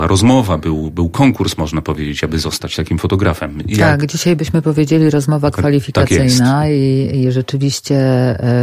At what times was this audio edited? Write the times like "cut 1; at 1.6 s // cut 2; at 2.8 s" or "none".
none